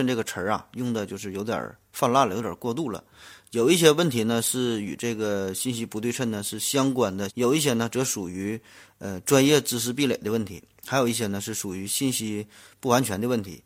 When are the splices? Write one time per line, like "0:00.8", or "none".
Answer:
0:07.3